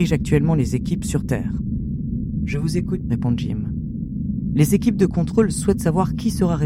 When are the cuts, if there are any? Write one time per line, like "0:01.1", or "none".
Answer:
0:03.0